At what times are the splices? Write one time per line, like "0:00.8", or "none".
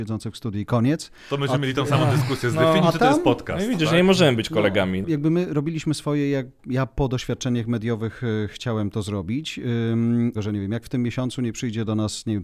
0:05.0
0:10.4

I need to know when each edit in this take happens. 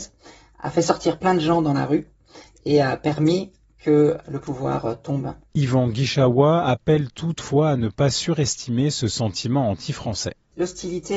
0:04.2

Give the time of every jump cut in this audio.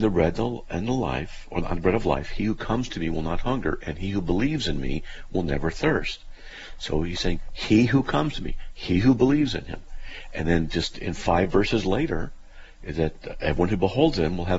none

